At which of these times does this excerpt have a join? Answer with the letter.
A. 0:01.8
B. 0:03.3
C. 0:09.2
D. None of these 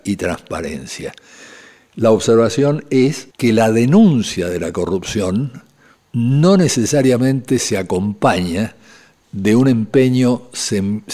B